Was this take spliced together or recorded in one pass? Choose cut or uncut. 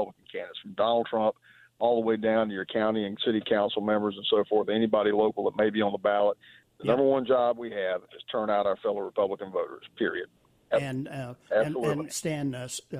cut